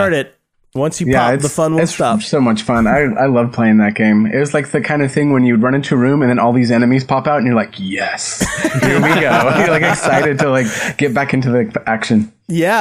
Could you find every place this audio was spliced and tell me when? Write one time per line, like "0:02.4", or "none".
none